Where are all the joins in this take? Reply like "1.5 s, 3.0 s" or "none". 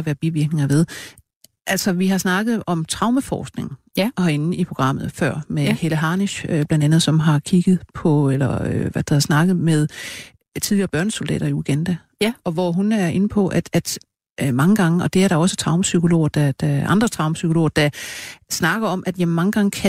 none